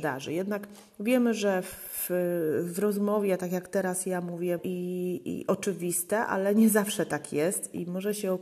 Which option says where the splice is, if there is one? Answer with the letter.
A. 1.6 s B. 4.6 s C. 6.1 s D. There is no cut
B